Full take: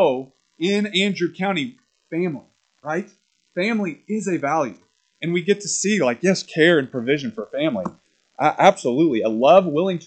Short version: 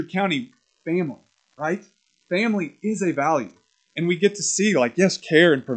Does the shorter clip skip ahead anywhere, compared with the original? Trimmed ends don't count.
no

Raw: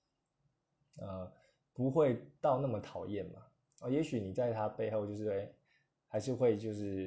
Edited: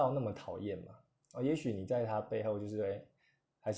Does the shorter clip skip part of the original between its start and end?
no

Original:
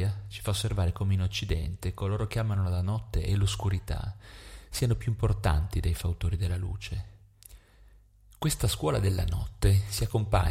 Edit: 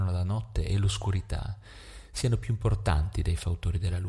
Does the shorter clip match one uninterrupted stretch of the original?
yes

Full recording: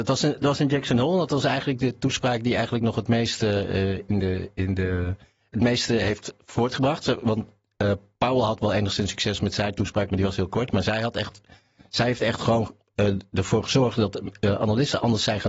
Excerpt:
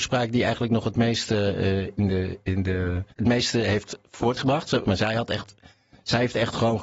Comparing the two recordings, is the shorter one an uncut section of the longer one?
no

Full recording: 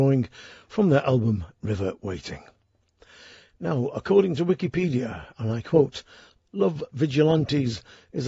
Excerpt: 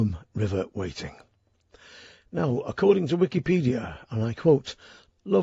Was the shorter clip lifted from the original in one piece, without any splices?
yes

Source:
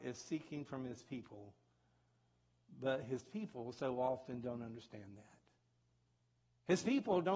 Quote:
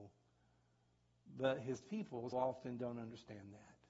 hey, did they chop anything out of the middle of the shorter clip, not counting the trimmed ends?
yes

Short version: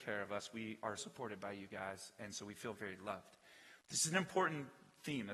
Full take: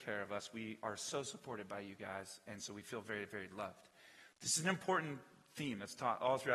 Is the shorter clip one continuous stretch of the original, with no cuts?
no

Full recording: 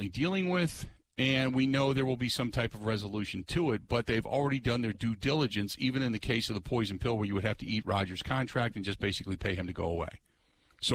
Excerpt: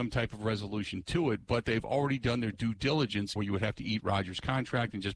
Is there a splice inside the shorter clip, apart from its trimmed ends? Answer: yes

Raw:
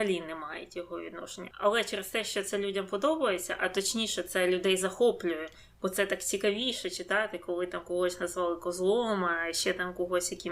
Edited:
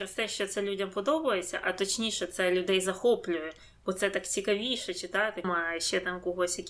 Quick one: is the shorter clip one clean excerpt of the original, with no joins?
no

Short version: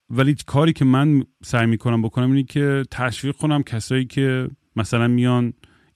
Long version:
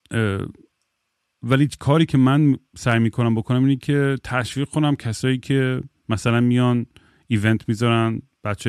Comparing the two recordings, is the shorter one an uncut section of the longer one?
yes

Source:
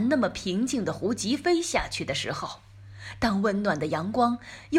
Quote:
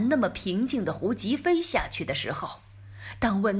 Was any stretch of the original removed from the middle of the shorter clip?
no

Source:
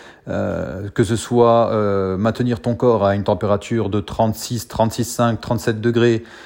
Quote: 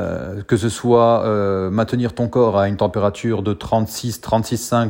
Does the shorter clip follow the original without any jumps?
yes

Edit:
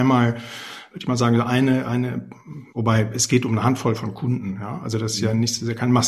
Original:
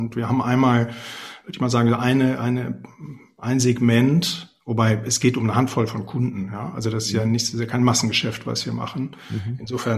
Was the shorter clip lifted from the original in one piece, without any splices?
no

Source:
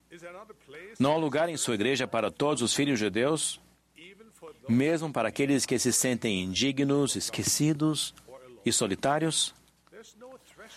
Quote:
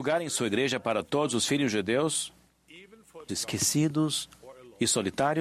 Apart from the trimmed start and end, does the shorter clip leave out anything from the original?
yes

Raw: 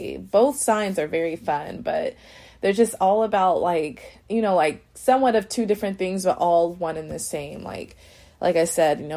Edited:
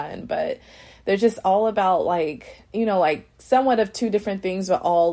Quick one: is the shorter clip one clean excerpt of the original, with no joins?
yes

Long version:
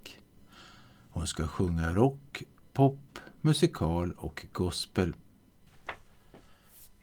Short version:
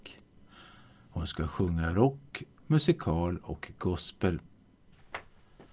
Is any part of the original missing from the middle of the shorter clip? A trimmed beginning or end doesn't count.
yes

